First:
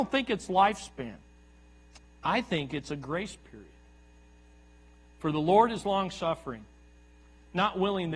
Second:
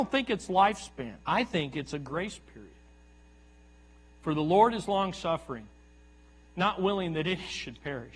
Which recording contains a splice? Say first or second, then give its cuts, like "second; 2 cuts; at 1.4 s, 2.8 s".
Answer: second; 1 cut; at 1.2 s